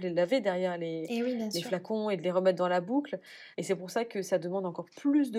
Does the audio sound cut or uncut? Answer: cut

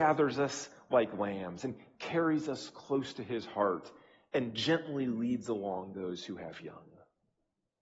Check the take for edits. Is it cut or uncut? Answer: uncut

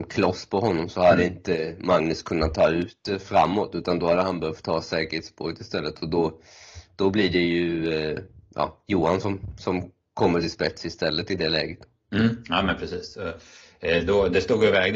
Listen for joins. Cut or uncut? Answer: uncut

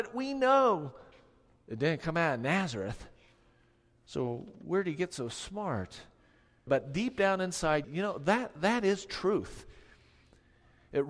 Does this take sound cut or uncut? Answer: cut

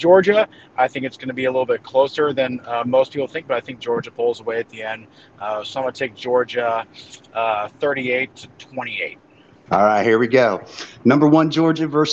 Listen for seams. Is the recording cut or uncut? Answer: cut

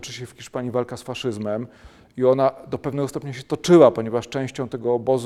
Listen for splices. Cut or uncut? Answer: uncut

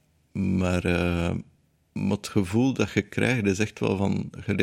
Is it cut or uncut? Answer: uncut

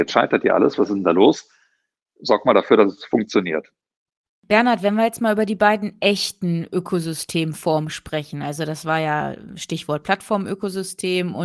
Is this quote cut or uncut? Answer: cut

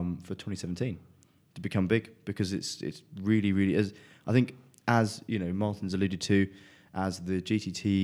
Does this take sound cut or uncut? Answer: uncut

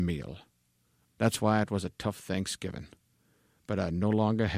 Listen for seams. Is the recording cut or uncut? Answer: cut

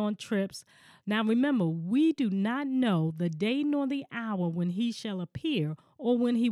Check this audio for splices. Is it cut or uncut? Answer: cut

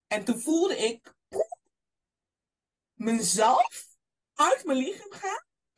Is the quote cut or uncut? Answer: uncut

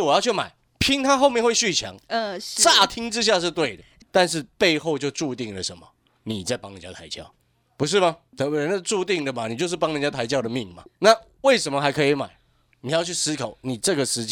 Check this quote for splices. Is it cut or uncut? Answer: uncut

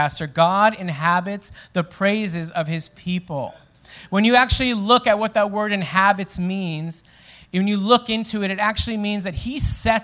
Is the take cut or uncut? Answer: uncut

